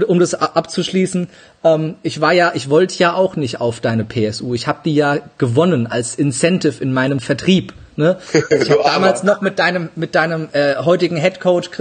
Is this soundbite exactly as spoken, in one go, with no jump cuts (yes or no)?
yes